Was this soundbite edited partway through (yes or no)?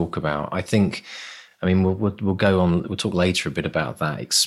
no